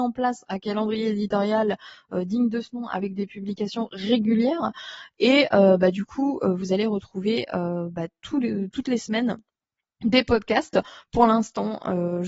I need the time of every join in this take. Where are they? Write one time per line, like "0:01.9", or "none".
none